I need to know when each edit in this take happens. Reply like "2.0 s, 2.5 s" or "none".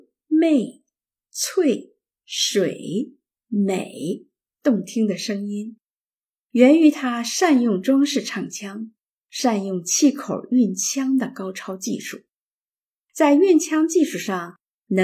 none